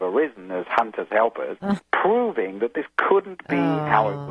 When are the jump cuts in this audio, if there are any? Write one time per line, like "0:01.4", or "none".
0:01.8